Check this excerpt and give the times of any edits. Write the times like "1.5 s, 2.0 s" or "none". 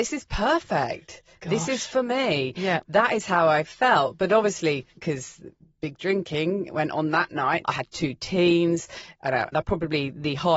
5.0 s, 7.6 s, 9.5 s